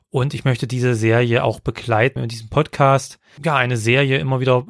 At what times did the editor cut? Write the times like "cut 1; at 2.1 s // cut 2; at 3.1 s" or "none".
cut 1; at 2.2 s // cut 2; at 3.4 s